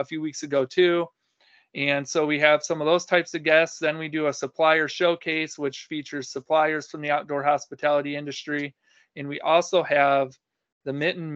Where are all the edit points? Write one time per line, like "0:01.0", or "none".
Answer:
none